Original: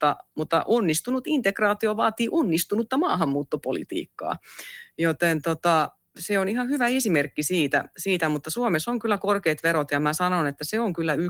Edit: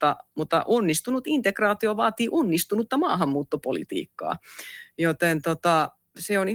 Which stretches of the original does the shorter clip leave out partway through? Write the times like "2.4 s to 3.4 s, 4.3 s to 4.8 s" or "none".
none